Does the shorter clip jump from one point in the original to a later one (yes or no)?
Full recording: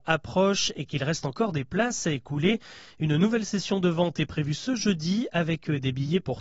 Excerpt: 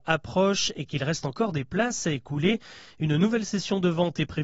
no